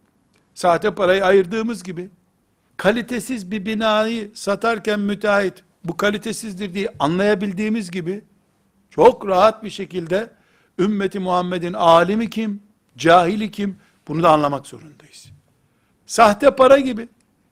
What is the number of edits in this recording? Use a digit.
2